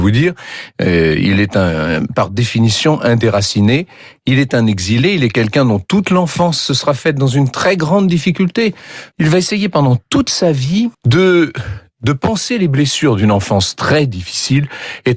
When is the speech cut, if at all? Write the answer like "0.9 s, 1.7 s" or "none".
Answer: 9.1 s, 10.9 s